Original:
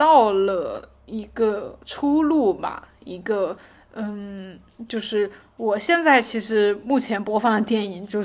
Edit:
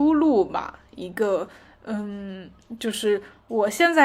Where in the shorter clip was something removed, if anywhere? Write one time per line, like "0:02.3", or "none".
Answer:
none